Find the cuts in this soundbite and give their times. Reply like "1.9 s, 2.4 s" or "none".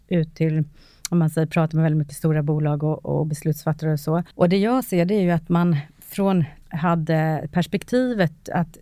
4.3 s, 6.6 s